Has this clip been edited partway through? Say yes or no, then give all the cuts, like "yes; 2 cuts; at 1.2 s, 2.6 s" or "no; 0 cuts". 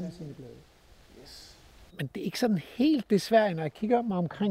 yes; 1 cut; at 1.9 s